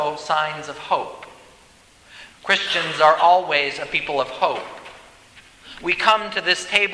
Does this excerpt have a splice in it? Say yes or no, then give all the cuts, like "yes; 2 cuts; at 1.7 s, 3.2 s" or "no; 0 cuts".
yes; 1 cut; at 2.3 s